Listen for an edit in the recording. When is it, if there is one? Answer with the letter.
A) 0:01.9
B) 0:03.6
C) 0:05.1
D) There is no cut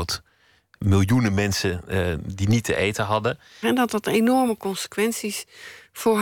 B